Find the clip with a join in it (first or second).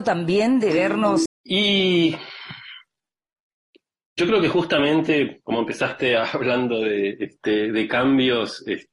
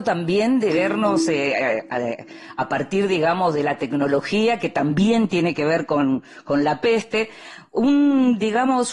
first